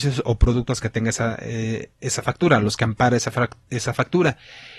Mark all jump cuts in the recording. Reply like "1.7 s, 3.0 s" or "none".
none